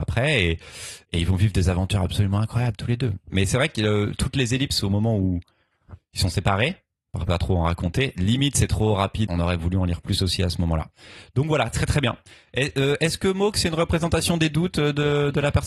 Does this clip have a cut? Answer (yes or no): yes